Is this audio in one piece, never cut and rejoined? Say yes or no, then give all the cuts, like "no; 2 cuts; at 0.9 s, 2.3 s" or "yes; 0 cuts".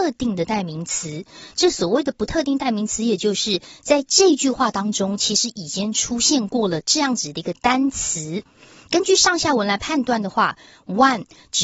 yes; 0 cuts